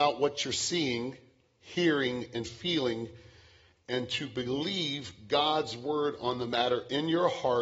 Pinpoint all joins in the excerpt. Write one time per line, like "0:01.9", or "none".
none